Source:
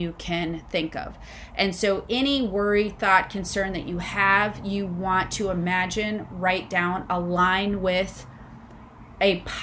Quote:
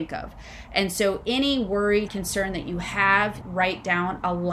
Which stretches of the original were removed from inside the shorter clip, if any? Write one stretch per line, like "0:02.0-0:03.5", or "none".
0:02.9-0:03.3
0:04.6-0:06.3

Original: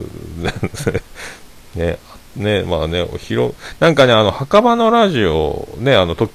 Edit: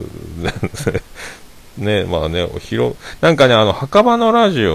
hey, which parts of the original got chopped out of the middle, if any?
0:01.7-0:02.3

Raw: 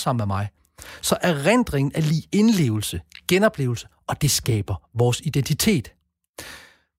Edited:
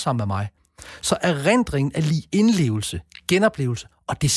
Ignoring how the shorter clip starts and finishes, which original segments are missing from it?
none

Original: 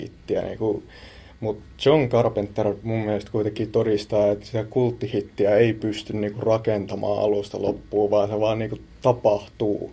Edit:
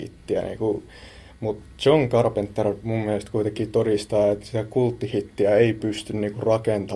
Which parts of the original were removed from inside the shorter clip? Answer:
none

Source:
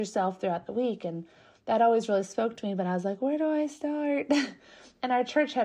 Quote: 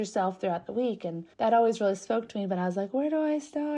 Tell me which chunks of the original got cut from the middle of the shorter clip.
0:01.3-0:01.6

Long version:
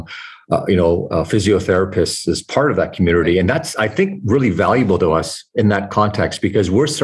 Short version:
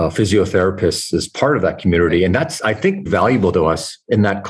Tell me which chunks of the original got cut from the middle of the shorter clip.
0:04.2-0:04.5

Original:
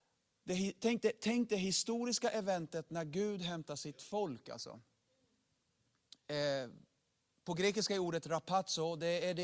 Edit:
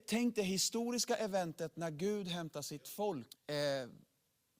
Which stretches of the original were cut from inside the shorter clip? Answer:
0:04.4-0:06.1

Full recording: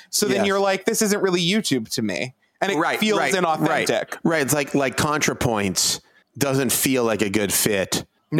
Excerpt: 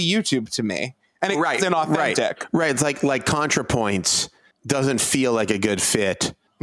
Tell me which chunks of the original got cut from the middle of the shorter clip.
0:03.0-0:03.3

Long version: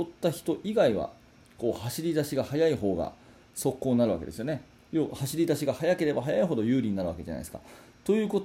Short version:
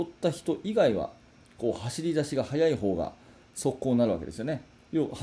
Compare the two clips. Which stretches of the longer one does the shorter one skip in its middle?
none

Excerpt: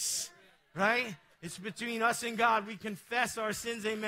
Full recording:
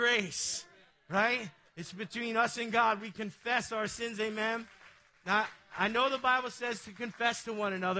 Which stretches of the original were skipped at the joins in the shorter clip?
none

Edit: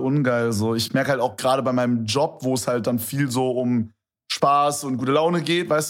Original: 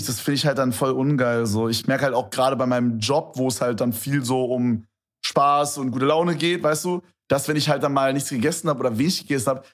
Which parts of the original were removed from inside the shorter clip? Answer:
none

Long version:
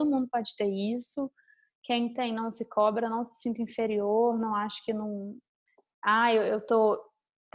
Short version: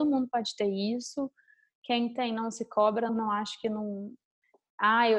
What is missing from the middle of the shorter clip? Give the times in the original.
0:03.1-0:04.3

